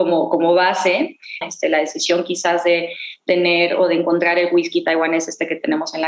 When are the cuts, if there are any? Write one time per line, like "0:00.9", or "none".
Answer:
0:01.4